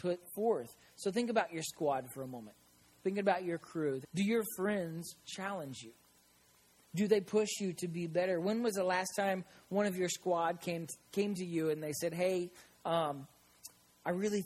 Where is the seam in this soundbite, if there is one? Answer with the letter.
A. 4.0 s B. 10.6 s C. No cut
A